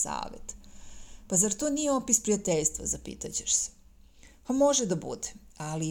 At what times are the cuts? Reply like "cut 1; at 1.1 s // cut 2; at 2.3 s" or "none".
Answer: none